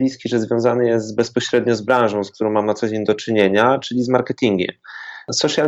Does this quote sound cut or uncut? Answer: uncut